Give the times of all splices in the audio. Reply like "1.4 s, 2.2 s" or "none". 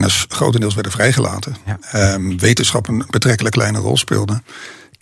none